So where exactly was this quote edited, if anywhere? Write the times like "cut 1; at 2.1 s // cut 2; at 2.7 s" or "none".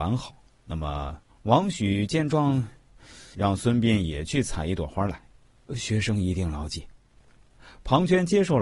cut 1; at 1.3 s // cut 2; at 3.3 s // cut 3; at 5.7 s